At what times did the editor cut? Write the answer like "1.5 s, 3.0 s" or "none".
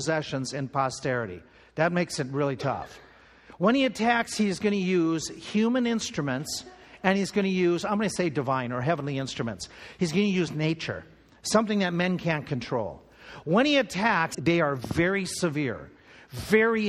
14.3 s